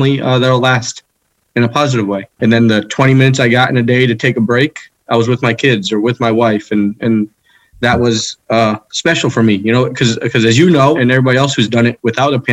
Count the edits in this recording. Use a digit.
2